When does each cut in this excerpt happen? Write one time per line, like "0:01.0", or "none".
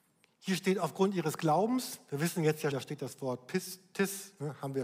0:02.7